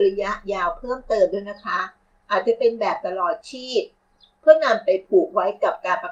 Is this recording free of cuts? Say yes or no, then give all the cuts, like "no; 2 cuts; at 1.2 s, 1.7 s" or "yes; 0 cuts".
yes; 0 cuts